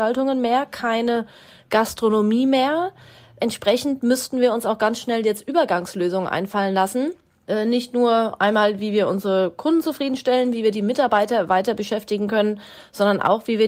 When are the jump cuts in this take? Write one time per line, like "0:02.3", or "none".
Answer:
none